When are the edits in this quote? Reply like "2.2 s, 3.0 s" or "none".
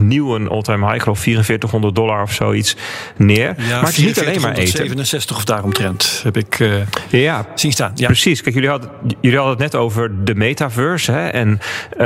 none